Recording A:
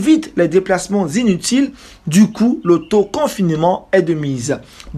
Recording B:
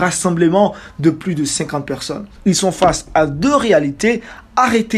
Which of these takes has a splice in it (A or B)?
B